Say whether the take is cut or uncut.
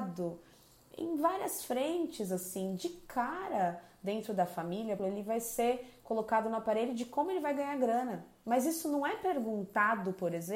cut